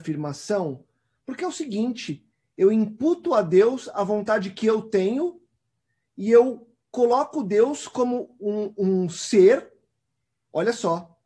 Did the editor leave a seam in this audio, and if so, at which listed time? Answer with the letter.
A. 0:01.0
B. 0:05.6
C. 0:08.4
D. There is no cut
D